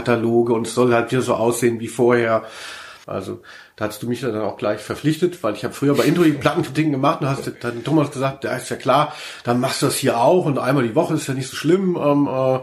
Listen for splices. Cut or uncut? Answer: cut